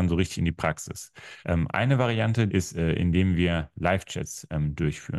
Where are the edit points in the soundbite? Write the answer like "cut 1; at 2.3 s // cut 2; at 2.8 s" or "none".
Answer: cut 1; at 1.4 s // cut 2; at 2.5 s